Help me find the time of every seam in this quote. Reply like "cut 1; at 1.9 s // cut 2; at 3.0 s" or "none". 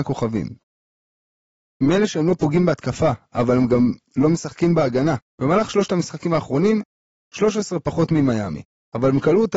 cut 1; at 5.3 s // cut 2; at 7.2 s